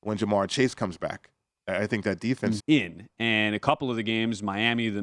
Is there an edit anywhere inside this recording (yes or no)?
yes